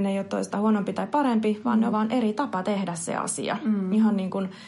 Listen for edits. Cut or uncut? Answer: cut